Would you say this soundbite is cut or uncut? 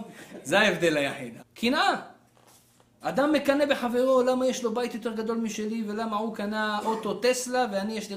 cut